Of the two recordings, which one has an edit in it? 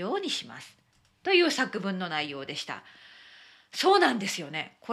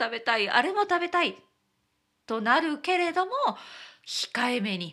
second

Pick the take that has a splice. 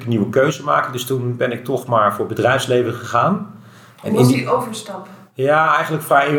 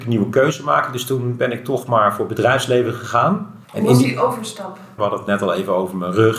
second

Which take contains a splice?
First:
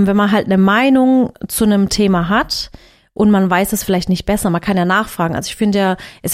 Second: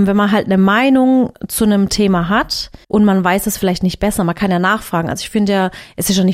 second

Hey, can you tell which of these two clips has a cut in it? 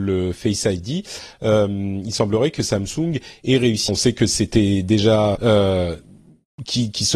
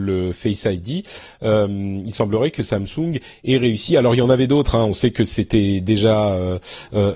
first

